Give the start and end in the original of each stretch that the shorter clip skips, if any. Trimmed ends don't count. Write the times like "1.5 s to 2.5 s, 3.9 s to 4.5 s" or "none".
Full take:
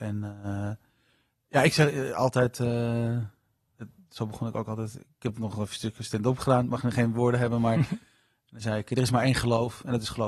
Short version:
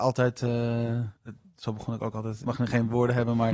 3.3 s to 3.7 s, 5.0 s to 6.7 s

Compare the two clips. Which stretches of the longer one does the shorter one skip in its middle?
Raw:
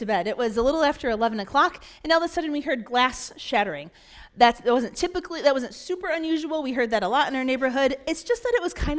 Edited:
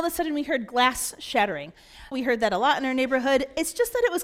4.3 s to 6.6 s

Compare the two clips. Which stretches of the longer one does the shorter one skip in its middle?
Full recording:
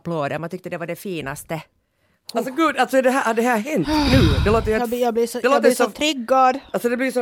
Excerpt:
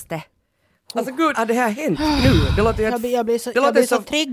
2.7 s to 3.2 s

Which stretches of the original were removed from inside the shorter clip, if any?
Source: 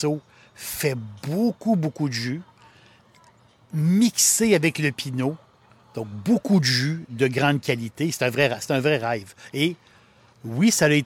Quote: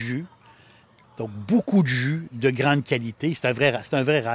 3.2 s to 5.8 s

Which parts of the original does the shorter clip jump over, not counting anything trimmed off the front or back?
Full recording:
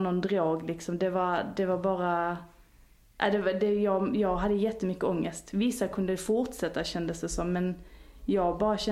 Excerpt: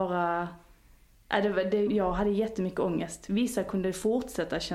3.8 s to 4.1 s

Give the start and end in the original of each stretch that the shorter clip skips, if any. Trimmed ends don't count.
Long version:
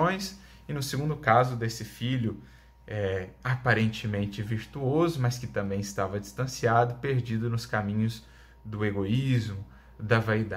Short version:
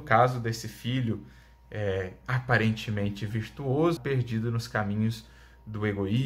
5.1 s to 7.0 s

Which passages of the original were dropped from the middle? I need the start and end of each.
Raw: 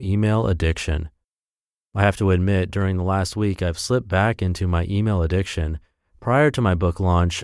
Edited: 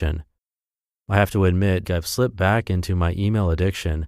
2.7 s to 3.6 s

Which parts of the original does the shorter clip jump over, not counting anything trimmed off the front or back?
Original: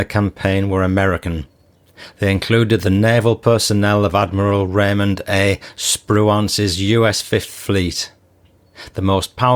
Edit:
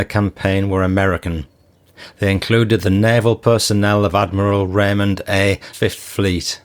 5.7 s to 7.2 s

